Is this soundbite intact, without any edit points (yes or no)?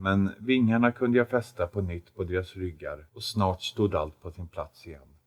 no